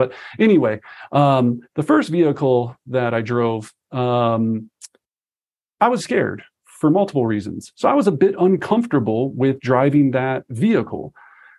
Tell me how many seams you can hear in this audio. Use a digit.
1